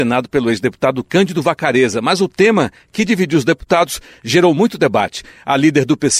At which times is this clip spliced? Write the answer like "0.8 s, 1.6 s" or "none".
none